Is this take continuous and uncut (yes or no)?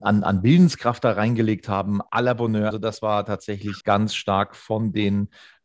no